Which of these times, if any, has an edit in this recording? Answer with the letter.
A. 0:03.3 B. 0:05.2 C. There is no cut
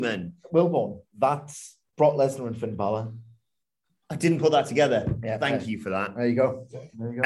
C